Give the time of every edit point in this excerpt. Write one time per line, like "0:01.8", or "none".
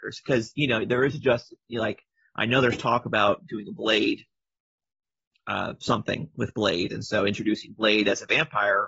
none